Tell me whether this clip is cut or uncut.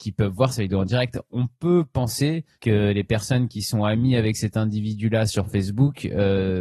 cut